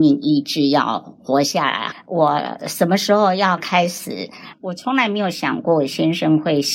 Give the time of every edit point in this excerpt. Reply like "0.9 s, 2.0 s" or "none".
1.9 s, 4.5 s